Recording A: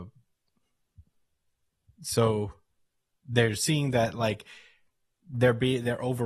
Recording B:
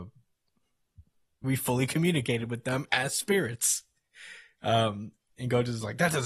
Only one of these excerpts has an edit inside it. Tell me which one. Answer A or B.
B